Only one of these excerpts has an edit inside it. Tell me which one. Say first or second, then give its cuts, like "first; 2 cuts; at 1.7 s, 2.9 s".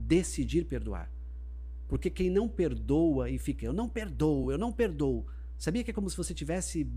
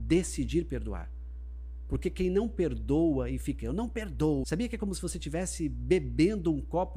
second; 1 cut; at 4.4 s